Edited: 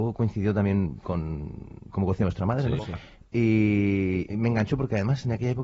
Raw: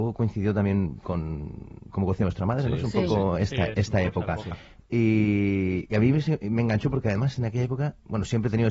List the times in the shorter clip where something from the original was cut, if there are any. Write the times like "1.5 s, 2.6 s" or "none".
2.8 s, 4.3 s